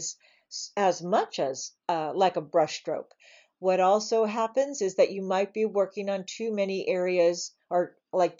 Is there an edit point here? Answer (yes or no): no